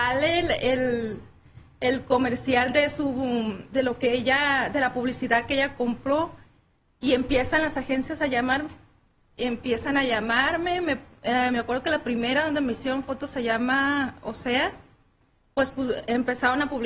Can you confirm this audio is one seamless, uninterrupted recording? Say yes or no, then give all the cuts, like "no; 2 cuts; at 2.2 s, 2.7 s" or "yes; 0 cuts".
yes; 0 cuts